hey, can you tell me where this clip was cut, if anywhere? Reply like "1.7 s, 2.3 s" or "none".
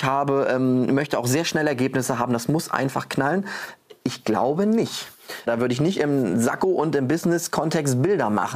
5.5 s